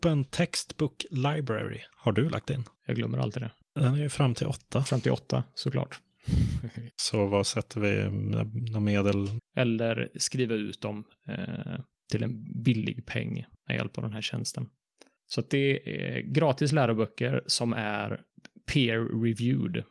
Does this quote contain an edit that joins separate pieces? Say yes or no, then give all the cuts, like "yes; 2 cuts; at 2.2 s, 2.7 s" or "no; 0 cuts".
yes; 3 cuts; at 2.7 s, 6.9 s, 9.4 s